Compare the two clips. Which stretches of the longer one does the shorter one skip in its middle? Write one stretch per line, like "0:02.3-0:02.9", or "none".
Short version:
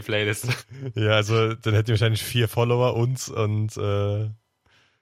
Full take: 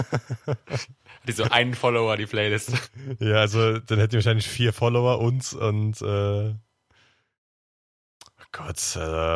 none